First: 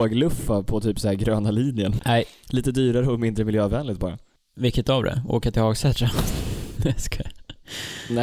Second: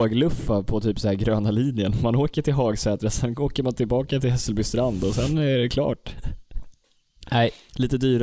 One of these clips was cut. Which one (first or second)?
first